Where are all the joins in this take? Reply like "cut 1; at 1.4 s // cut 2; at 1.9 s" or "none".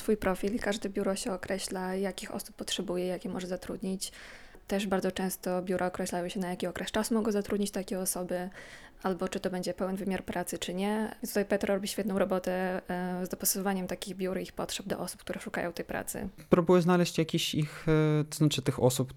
none